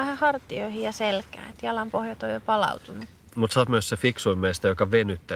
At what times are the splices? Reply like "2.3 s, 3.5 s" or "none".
none